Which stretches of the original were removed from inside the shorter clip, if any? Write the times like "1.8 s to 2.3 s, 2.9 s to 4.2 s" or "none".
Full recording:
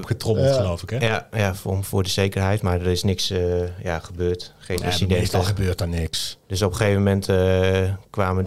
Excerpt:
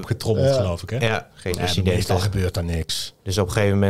1.3 s to 4.5 s